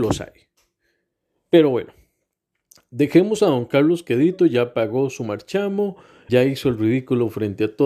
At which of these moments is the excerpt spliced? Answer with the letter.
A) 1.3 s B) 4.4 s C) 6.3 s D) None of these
C